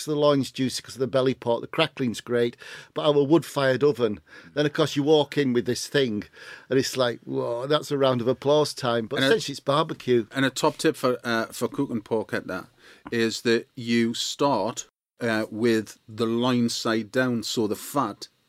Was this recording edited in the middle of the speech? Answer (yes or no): no